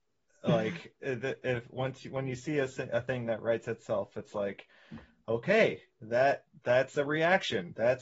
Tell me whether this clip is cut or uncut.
uncut